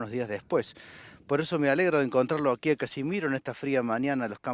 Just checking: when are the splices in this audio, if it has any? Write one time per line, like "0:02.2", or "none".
none